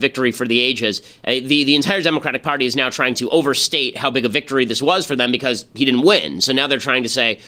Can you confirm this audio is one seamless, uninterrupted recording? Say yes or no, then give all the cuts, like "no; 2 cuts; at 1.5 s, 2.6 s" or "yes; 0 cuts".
yes; 0 cuts